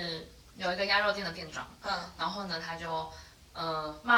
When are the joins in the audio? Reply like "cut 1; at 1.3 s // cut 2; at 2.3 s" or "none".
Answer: none